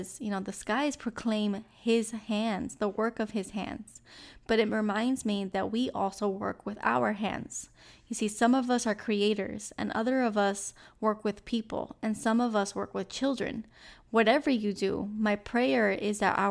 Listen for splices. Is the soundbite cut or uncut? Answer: uncut